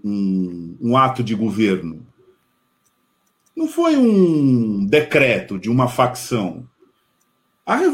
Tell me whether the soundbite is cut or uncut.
uncut